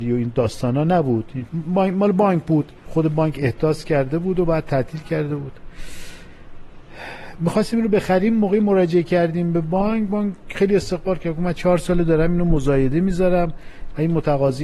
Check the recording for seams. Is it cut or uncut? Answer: cut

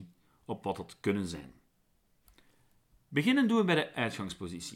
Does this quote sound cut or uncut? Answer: uncut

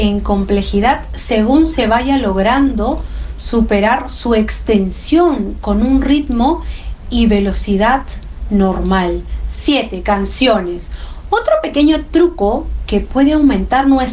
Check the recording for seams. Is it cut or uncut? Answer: uncut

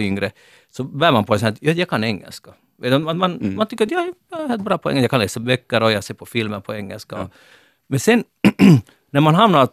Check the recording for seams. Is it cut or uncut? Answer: uncut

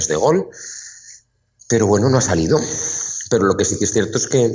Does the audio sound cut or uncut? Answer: uncut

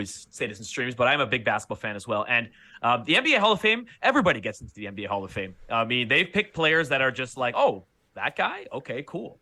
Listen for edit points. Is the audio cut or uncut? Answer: uncut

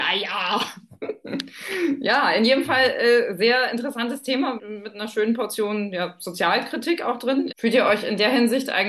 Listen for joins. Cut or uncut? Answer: cut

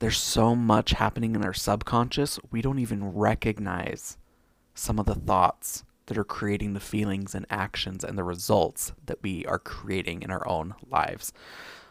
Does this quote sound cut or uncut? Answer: uncut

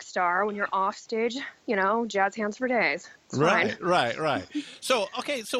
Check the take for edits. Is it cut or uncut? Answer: uncut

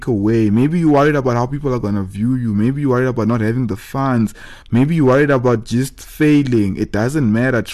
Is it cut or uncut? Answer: uncut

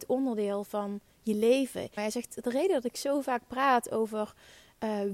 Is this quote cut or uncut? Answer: cut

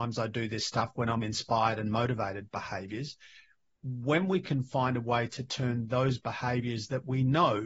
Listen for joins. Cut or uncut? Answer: uncut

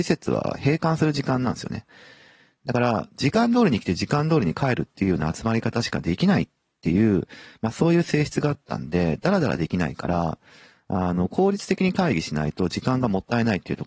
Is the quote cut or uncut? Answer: uncut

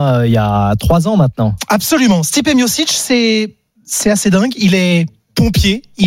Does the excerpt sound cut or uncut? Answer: uncut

